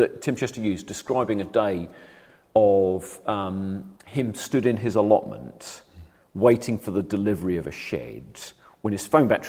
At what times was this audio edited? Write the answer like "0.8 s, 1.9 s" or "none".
4.0 s